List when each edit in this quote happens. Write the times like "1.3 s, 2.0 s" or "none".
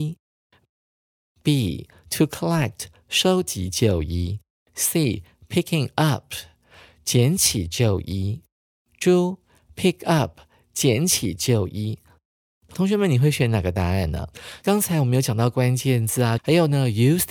16.4 s